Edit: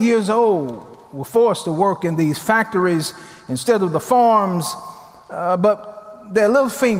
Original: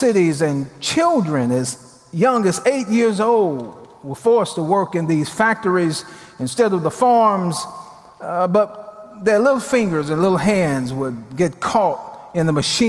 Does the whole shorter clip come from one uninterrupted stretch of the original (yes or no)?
yes